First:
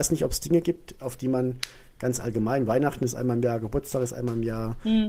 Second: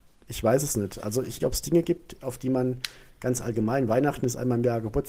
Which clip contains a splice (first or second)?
second